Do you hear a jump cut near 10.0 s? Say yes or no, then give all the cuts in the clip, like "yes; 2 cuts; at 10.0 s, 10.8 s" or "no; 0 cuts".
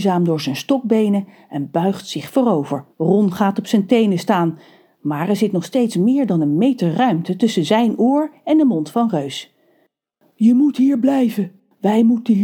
no; 1 cut; at 2.9 s